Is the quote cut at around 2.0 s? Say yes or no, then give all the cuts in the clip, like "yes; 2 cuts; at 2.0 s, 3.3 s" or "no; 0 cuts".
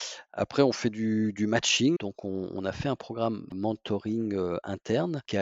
yes; 2 cuts; at 2.0 s, 3.5 s